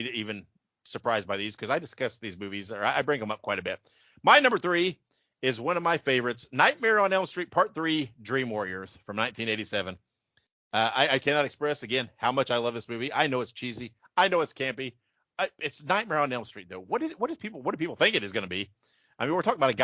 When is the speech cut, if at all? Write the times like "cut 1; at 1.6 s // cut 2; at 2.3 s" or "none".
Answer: none